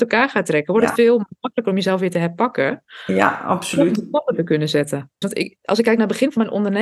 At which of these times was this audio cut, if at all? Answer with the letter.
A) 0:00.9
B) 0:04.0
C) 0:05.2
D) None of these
C